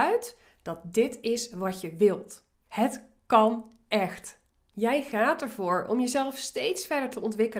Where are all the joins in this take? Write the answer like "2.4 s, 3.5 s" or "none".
2.7 s

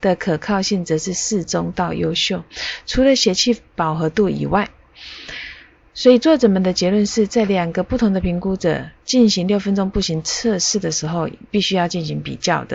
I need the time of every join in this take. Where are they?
none

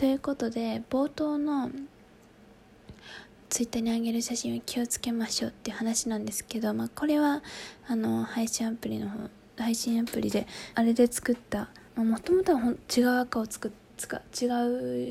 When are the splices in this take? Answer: 10.7 s, 11.9 s

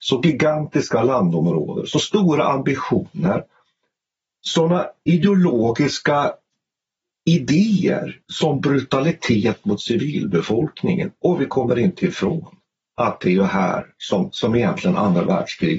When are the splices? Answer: 8.2 s

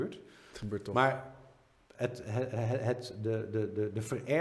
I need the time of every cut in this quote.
none

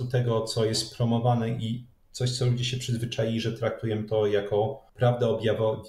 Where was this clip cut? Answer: 4.9 s

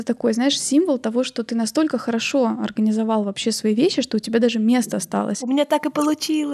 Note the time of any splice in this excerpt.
none

